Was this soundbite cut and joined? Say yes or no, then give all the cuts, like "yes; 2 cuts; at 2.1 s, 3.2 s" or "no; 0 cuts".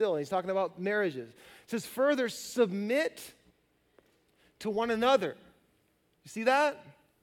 no; 0 cuts